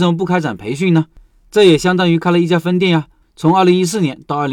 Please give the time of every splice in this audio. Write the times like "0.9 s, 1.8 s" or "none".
3.2 s